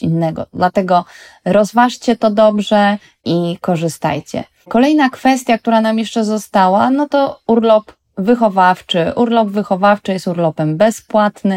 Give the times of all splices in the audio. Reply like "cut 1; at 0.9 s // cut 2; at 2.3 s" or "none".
none